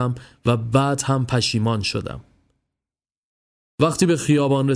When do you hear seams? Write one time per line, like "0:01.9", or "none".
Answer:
none